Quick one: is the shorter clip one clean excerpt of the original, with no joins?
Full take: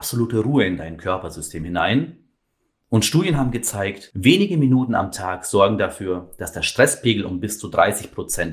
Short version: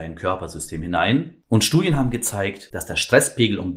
no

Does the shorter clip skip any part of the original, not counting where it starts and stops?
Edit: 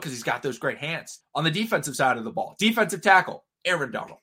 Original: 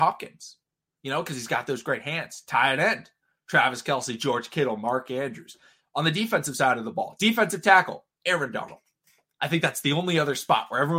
yes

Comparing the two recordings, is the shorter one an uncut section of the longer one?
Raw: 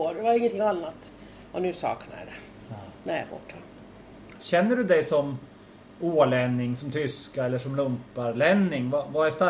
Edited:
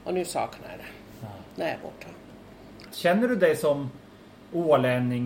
yes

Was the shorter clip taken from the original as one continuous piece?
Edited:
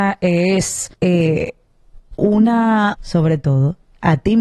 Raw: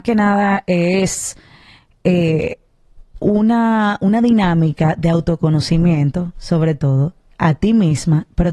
no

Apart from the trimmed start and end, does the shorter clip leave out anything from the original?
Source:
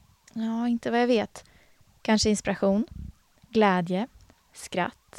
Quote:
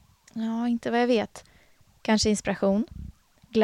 no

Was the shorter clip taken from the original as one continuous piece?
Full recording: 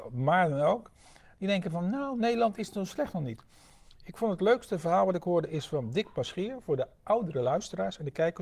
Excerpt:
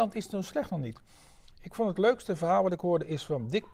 yes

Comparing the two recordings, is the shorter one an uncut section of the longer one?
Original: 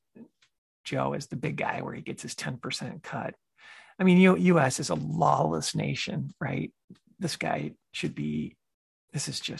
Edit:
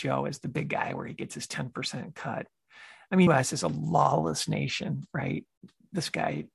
no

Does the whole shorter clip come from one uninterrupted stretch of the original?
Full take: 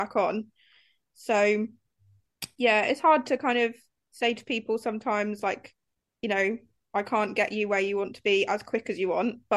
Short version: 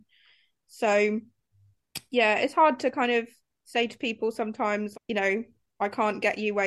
no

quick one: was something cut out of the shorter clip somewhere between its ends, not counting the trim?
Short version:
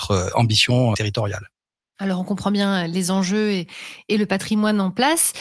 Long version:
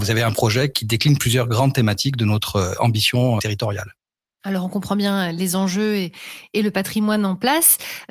no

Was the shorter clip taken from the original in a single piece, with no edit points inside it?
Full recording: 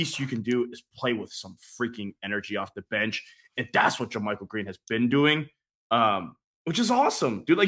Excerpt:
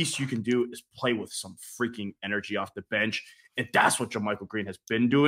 yes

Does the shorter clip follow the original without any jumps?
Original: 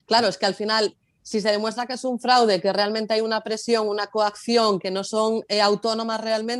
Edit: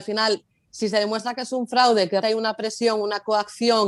no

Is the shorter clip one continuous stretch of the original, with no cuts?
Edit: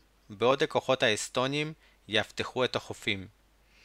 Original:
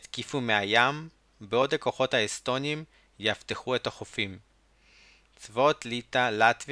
yes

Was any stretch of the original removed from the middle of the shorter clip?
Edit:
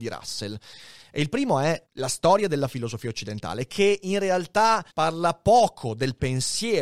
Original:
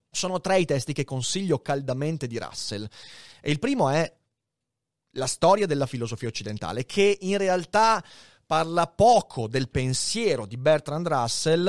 yes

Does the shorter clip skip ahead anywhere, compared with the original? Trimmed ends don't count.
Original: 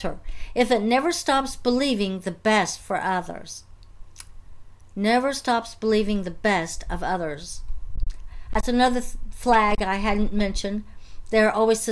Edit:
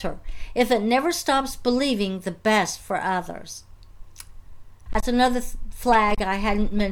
yes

